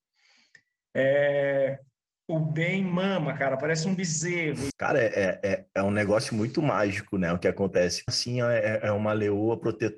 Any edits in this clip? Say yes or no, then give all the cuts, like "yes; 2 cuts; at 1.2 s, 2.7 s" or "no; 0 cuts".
yes; 2 cuts; at 4.7 s, 8.1 s